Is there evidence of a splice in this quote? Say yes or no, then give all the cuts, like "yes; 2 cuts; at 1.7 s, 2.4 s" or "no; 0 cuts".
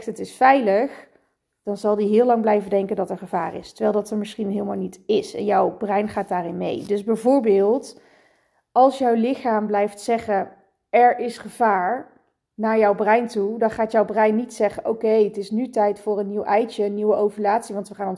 no; 0 cuts